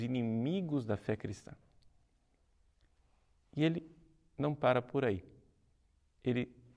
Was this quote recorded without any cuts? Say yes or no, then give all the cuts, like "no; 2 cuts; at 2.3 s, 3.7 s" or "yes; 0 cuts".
yes; 0 cuts